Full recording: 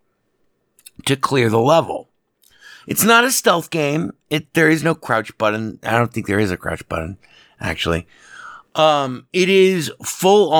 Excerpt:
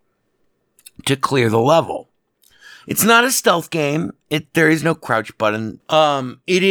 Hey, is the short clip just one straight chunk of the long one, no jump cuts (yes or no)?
no